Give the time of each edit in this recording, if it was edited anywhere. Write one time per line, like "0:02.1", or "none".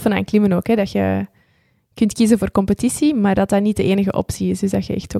none